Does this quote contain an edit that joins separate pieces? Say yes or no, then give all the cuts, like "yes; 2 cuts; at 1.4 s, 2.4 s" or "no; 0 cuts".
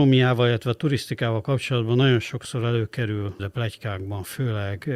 yes; 1 cut; at 3.4 s